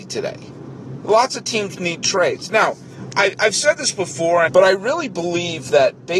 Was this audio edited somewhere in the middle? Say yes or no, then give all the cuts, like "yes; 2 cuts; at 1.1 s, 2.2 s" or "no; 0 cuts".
yes; 1 cut; at 4.5 s